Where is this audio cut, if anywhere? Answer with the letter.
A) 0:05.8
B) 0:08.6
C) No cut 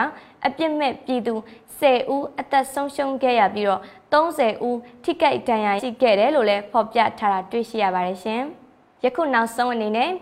A